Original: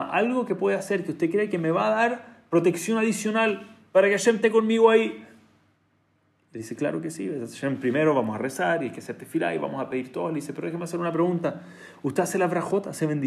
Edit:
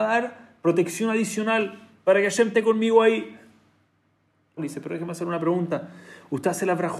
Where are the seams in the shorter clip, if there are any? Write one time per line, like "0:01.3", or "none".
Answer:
0:04.6